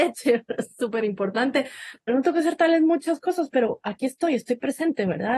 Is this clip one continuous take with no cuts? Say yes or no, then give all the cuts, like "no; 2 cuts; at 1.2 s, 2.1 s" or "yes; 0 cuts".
no; 1 cut; at 2.1 s